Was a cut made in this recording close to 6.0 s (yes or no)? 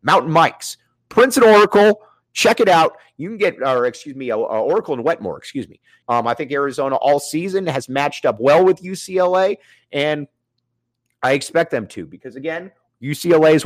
yes